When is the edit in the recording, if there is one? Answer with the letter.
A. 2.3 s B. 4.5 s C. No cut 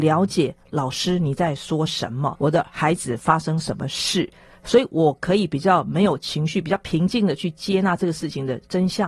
A